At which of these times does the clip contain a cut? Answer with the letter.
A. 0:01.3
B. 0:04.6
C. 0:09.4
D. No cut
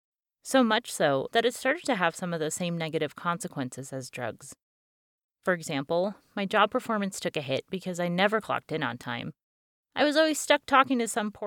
A